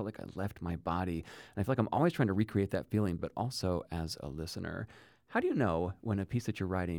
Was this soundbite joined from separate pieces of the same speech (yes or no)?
yes